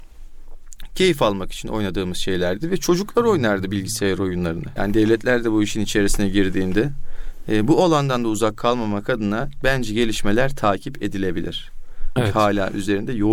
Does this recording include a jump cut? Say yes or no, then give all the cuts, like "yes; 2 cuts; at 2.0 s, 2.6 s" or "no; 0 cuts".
yes; 2 cuts; at 4.8 s, 12.2 s